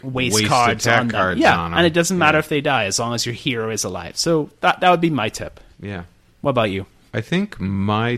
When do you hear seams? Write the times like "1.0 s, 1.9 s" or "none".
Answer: none